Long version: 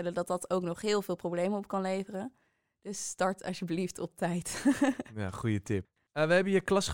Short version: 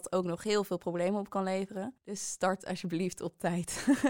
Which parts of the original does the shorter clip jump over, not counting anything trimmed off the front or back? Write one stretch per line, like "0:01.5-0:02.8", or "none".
0:02.4-0:02.8